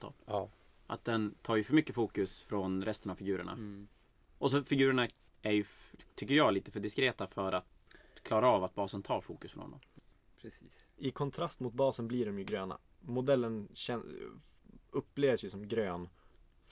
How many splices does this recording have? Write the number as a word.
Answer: one